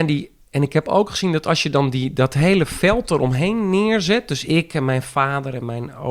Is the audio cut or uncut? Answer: uncut